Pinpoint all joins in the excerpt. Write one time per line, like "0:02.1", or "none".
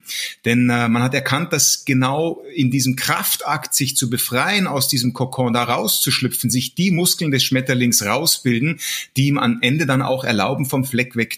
none

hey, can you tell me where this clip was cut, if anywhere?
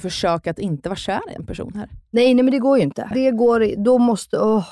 0:03.1

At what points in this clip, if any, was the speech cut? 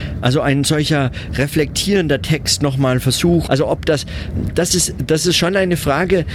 0:03.5

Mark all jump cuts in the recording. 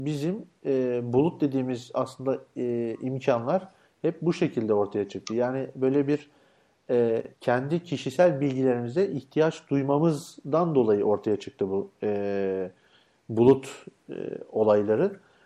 0:07.3

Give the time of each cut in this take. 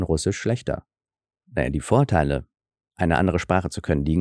0:01.4

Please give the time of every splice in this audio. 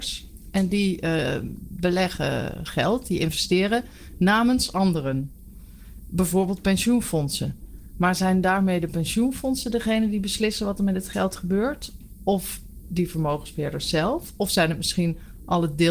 none

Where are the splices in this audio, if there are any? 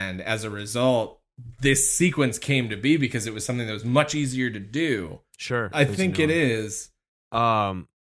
0:05.7
0:07.2

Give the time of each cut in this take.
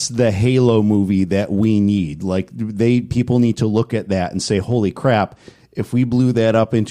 none

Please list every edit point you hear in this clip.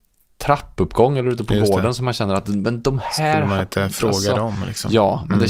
none

